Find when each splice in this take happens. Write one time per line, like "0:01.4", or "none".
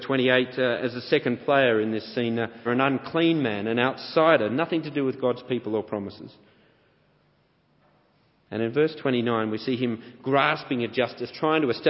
0:02.7